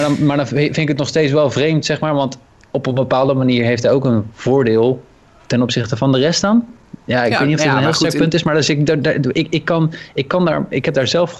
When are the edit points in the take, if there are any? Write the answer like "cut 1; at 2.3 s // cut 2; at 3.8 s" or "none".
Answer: cut 1; at 9.3 s